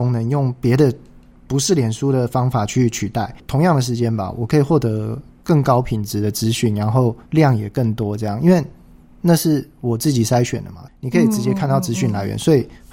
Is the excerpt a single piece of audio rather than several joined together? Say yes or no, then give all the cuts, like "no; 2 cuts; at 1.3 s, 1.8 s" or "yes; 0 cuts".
no; 1 cut; at 7.3 s